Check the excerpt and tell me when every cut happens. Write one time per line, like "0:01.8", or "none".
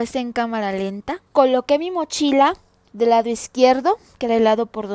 0:01.3

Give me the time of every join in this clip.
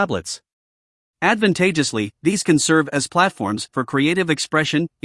0:01.1

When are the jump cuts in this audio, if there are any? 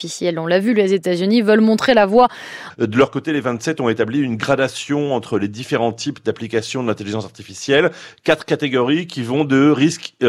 0:02.7

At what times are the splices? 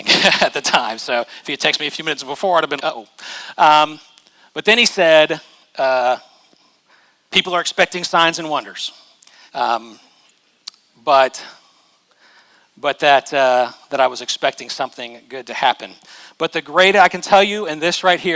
0:02.8
0:07.3
0:09.5

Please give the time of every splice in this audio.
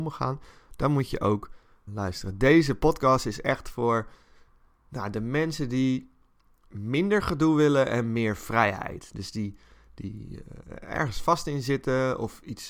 0:01.9

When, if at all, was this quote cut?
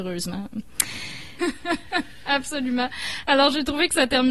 0:01.4

